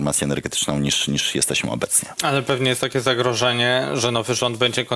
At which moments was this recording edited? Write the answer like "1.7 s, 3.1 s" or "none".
none